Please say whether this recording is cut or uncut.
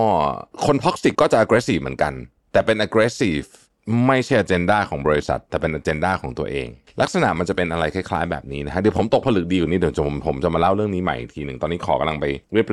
cut